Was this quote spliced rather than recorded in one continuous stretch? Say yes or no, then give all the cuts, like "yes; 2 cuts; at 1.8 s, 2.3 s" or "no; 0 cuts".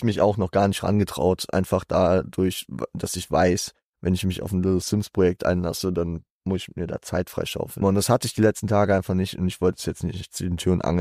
yes; 1 cut; at 7.8 s